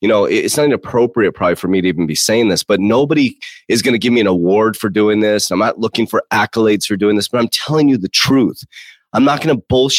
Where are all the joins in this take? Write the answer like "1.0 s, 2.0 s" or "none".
none